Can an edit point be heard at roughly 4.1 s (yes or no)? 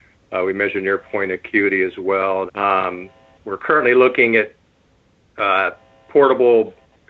no